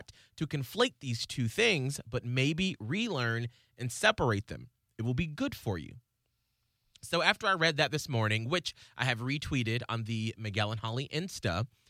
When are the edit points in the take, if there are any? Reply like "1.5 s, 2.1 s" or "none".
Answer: none